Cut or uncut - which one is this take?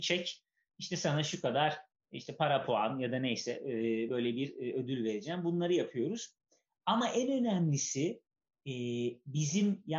uncut